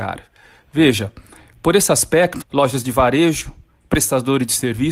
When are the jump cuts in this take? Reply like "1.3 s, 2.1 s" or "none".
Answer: 2.4 s

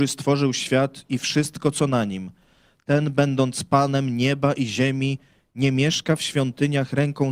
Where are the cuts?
none

